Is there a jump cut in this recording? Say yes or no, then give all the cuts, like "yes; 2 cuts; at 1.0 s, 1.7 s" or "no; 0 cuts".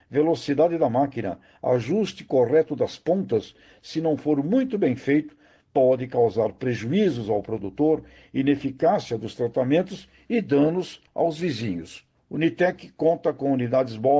no; 0 cuts